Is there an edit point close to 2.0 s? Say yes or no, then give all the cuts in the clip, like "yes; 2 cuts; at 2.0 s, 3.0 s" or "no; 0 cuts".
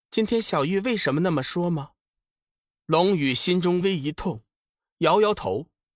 no; 1 cut; at 3.8 s